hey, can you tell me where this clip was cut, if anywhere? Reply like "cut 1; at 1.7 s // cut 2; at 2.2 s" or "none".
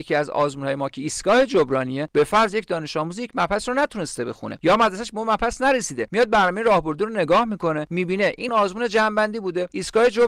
cut 1; at 8.5 s